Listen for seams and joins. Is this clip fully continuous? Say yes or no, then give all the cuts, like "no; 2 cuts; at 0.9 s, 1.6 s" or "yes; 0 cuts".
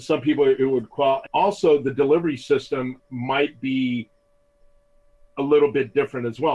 no; 1 cut; at 1.3 s